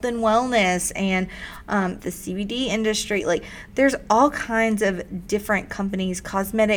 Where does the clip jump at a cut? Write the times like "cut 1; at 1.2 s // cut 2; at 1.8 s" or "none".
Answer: cut 1; at 2.0 s